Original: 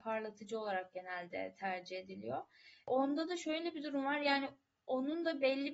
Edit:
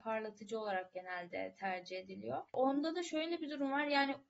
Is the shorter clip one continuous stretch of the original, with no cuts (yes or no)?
no